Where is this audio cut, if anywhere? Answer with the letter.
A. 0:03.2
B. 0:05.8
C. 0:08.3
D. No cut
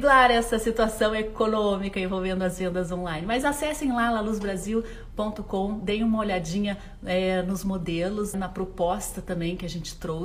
C